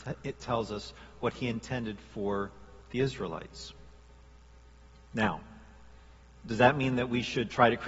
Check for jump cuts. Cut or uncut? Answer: uncut